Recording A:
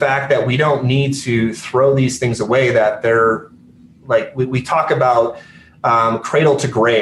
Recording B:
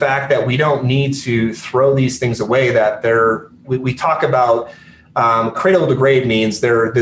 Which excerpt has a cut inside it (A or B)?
B